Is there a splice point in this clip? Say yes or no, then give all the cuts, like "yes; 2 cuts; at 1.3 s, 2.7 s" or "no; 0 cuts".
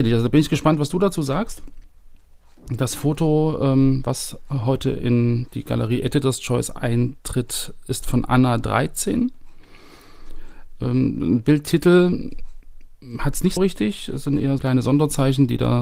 yes; 2 cuts; at 13.6 s, 14.6 s